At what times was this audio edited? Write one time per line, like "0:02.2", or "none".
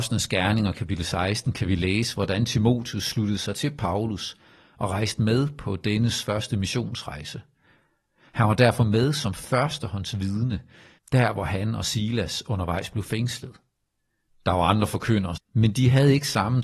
0:11.0
0:14.3
0:15.4